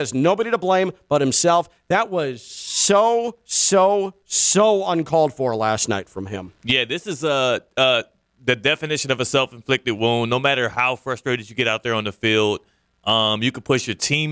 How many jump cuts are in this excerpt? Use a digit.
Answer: 0